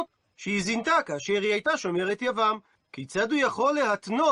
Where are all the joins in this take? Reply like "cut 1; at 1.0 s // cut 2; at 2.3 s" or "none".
cut 1; at 2.7 s